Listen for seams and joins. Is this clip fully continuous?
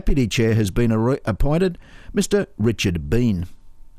yes; 0 cuts

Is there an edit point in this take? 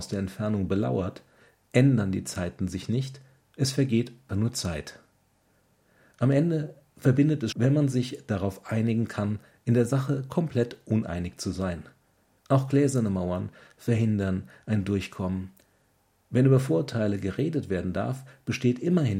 yes; 3 cuts; at 4.3 s, 7.5 s, 12.4 s

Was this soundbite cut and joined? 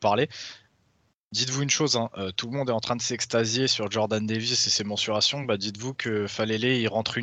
no; 0 cuts

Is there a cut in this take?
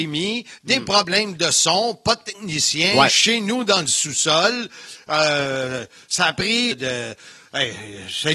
yes; 1 cut; at 6.7 s

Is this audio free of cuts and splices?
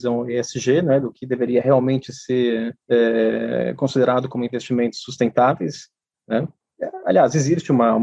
no; 1 cut; at 2.8 s

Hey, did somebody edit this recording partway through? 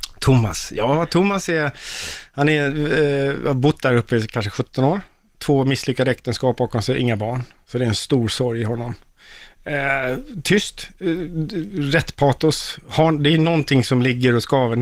no; 0 cuts

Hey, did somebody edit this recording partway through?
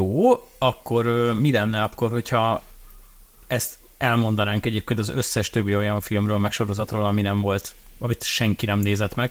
no; 0 cuts

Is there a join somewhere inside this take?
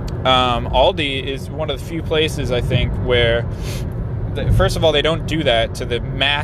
no; 0 cuts

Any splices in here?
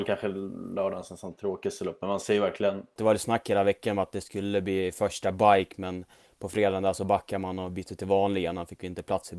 yes; 1 cut; at 3.0 s

